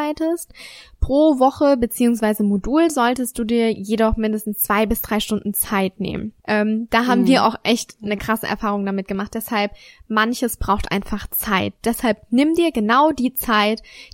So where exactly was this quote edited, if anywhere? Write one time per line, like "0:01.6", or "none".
0:06.4